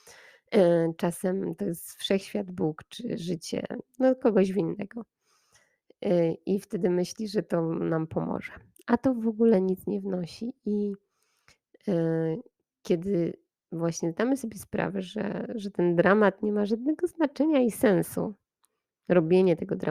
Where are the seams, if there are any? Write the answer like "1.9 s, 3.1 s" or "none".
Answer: none